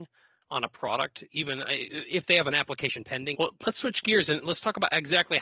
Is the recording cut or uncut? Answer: cut